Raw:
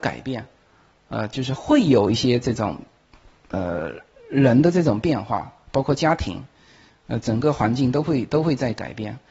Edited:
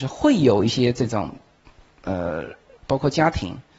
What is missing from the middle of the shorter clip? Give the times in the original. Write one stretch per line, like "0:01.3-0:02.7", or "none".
0:04.2-0:05.6